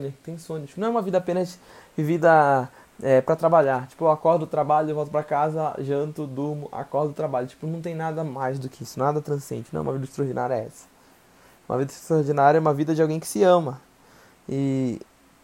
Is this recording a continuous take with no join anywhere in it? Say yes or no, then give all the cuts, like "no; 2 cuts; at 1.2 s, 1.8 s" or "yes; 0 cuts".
yes; 0 cuts